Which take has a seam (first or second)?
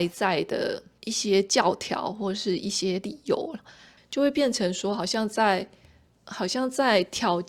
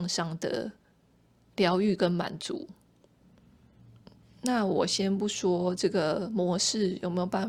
first